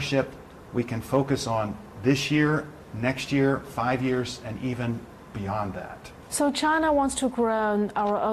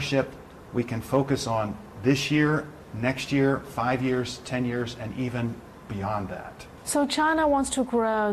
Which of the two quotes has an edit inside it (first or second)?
first